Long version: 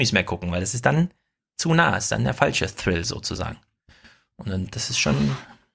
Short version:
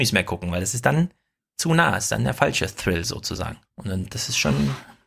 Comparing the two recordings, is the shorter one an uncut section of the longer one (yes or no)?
no